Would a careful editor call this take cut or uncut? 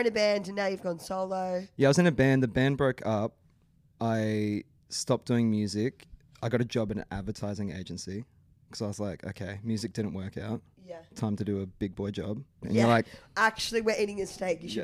cut